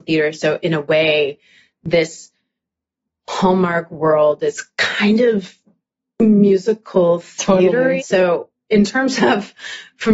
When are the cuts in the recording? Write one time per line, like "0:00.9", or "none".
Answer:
0:08.0